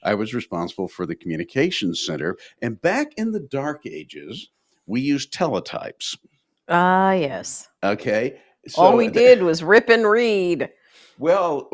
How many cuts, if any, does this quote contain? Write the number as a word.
zero